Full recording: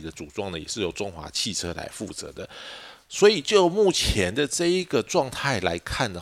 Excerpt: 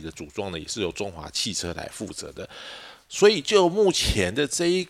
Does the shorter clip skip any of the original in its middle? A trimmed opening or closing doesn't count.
no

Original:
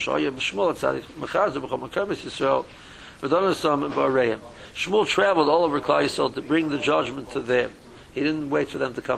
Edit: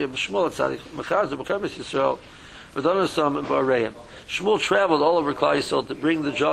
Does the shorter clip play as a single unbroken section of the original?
no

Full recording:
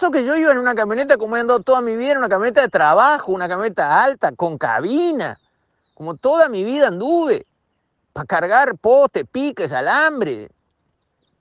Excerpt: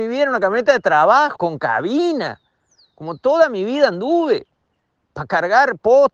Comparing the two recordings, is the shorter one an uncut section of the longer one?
no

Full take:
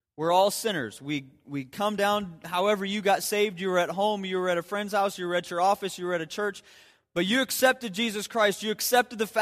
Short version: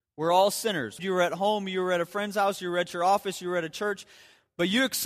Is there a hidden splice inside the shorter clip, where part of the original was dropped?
yes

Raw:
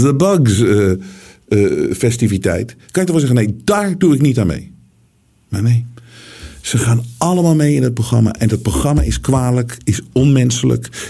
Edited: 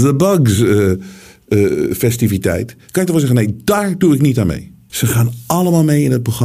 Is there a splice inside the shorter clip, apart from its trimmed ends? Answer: yes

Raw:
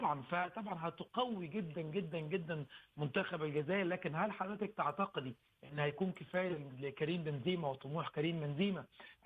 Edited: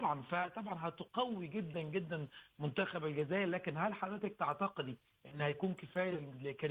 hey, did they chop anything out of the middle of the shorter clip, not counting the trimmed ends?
yes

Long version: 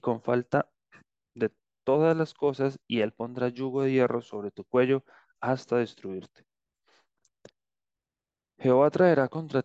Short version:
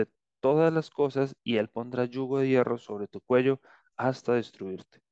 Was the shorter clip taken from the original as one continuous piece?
yes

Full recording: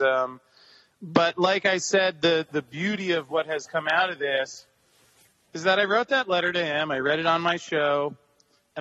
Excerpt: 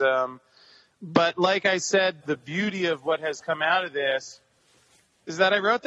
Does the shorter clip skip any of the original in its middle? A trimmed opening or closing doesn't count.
yes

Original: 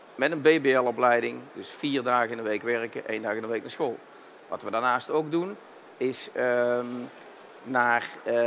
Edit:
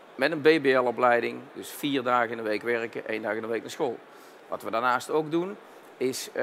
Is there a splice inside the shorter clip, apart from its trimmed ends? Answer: no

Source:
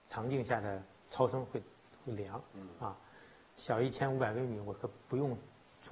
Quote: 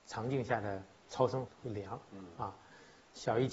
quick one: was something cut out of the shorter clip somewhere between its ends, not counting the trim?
yes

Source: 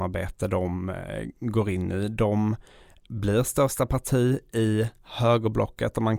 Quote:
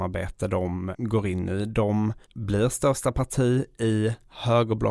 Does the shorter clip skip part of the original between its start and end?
yes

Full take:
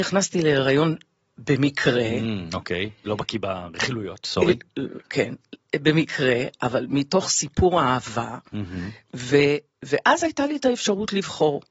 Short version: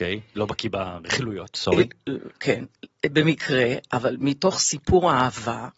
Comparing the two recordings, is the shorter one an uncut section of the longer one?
yes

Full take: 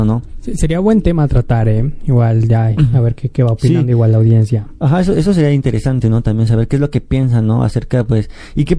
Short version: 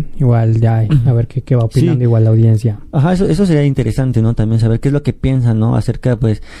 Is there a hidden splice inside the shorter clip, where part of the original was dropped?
no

